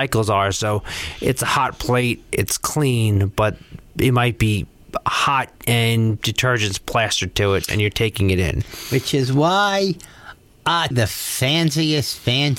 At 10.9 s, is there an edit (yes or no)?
yes